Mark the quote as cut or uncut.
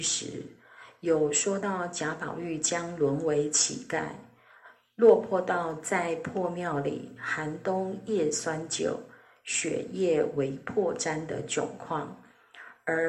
uncut